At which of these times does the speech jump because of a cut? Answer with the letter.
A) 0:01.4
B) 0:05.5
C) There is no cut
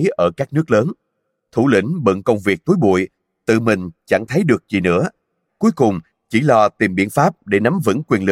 B